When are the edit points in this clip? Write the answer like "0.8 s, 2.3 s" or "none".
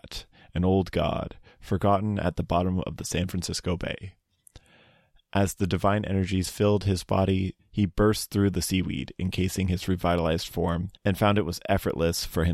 7.6 s, 11.0 s

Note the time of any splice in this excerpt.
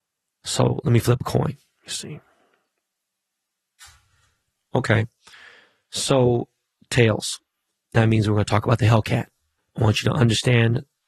9.6 s

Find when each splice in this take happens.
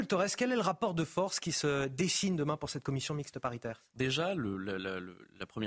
4.0 s

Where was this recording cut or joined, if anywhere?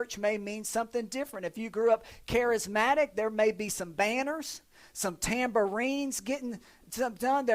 none

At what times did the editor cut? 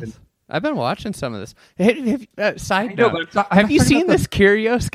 2.3 s

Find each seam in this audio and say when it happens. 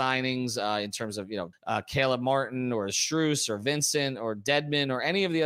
1.5 s

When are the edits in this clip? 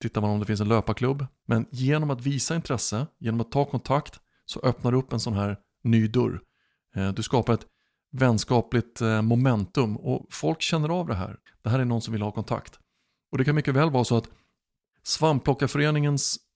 1.4 s, 11.5 s

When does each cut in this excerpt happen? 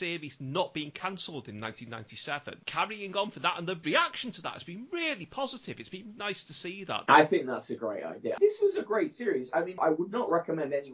6.2 s

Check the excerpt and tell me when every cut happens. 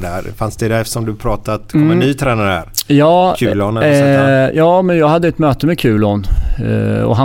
none

